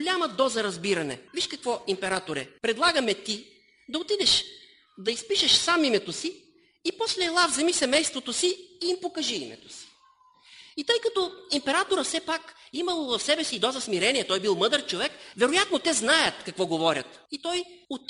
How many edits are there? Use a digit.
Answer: 1